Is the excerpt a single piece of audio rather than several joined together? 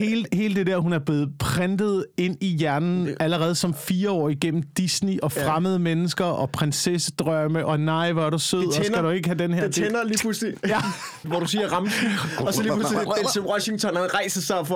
no; 1 cut; at 11.2 s

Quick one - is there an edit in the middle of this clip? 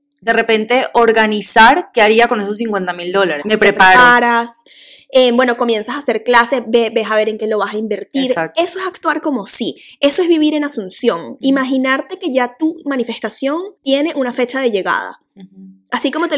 yes; 2 cuts; at 3.4 s, 13.8 s

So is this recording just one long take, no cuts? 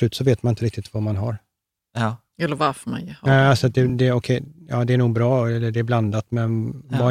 yes; 0 cuts

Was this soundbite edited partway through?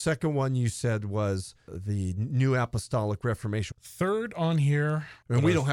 yes; 1 cut; at 3.7 s

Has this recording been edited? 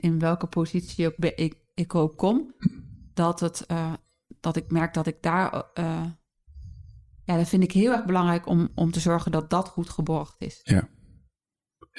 no; 0 cuts

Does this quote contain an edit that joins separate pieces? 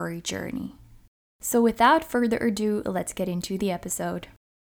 no; 0 cuts

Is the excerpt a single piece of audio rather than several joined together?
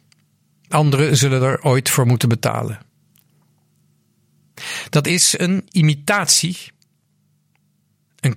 yes; 0 cuts

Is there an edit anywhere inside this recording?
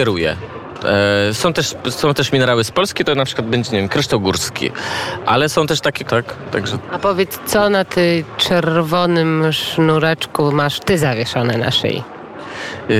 yes; 1 cut; at 6.0 s

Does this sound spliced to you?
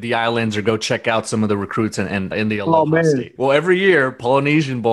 yes; 2 cuts; at 2.3 s, 3.4 s

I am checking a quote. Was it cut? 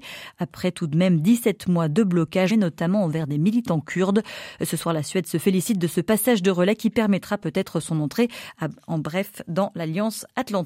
yes; 1 cut; at 2.5 s

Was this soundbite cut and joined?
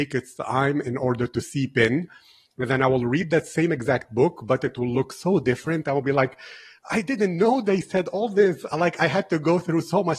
no; 0 cuts

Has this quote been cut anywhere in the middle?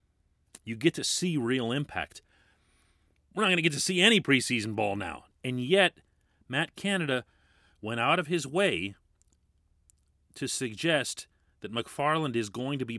yes; 1 cut; at 5.3 s

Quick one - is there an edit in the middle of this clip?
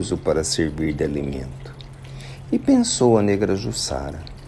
no; 0 cuts

